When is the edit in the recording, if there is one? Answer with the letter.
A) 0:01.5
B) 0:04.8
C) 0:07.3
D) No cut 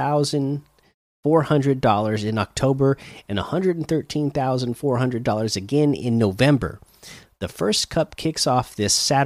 D